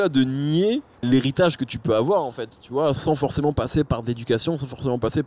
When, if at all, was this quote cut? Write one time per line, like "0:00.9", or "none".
0:01.0
0:03.0